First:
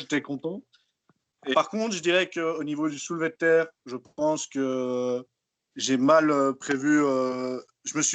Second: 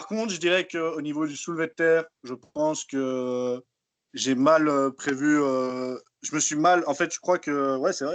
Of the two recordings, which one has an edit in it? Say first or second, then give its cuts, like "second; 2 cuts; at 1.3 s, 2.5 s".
first; 1 cut; at 1.5 s